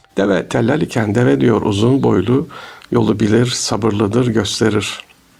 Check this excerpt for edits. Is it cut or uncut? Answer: uncut